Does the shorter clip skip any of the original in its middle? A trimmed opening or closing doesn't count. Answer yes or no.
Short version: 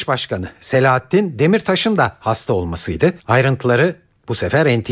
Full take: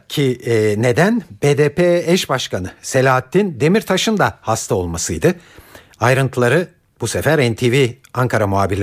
yes